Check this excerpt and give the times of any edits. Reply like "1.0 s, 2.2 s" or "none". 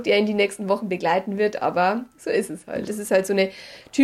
2.8 s